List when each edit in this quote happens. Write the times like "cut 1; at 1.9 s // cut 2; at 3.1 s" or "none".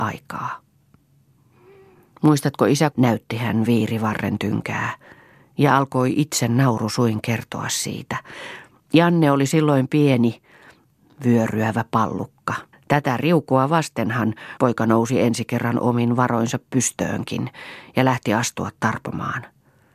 cut 1; at 2.9 s // cut 2; at 12.7 s // cut 3; at 14.6 s

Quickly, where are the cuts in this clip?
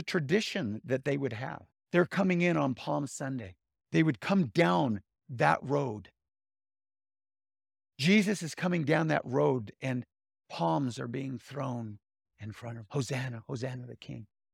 cut 1; at 1.7 s

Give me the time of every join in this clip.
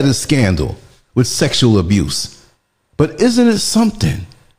cut 1; at 2.8 s

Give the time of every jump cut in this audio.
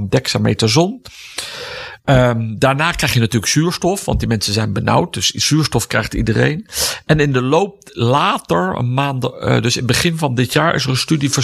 none

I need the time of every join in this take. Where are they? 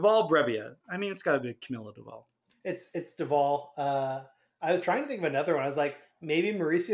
none

